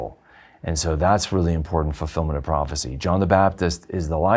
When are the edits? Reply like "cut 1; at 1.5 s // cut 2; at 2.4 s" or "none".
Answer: none